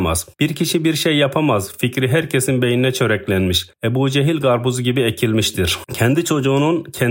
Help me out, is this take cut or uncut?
uncut